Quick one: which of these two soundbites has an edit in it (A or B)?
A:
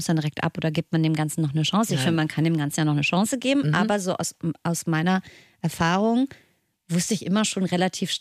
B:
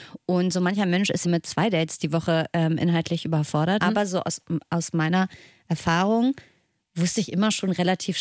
B